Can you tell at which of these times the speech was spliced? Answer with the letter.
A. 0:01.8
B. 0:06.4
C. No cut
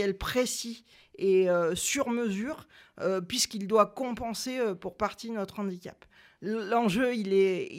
B